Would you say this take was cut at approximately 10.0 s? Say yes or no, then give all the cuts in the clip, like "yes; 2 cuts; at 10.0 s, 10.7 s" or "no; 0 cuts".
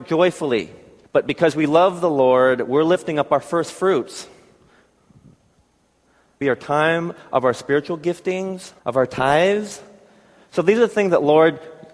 no; 3 cuts; at 1.0 s, 6.4 s, 8.8 s